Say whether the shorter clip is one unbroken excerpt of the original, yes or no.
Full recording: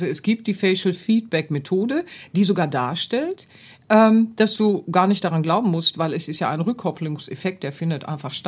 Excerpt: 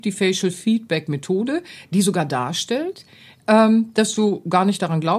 yes